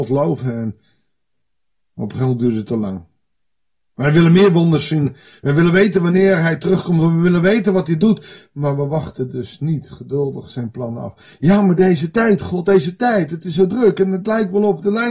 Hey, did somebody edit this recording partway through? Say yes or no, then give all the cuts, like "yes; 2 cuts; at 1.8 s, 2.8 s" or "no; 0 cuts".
no; 0 cuts